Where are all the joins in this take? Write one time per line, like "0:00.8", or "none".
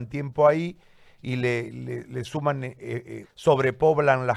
0:03.2